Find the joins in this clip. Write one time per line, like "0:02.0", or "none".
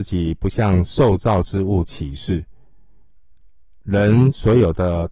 none